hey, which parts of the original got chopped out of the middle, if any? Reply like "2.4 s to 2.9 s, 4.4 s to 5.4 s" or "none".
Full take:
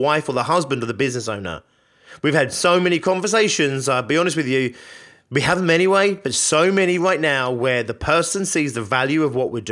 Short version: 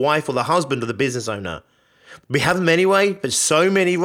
2.2 s to 5.2 s